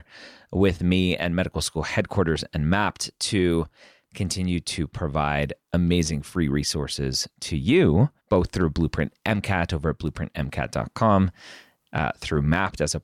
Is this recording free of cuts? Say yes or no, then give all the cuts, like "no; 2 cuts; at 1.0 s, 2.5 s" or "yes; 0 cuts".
no; 1 cut; at 8.2 s